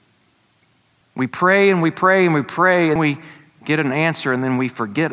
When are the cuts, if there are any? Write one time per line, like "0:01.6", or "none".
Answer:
0:01.0
0:03.0